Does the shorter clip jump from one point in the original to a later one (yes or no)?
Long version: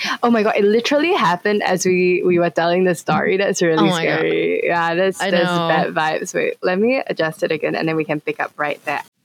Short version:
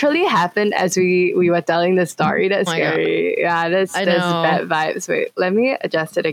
yes